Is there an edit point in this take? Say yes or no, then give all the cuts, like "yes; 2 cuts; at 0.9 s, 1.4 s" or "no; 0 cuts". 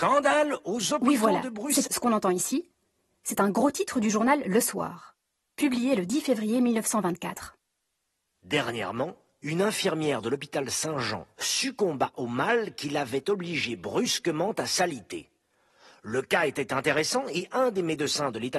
yes; 3 cuts; at 1.8 s, 8.4 s, 11.3 s